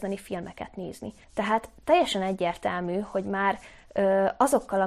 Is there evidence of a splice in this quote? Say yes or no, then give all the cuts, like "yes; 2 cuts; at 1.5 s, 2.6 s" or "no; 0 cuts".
yes; 1 cut; at 1.2 s